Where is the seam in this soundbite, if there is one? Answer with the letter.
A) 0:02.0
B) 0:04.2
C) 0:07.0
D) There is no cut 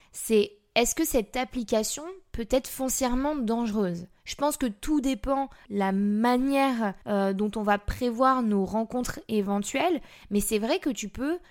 B